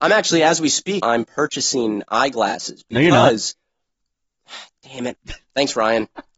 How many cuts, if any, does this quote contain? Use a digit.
2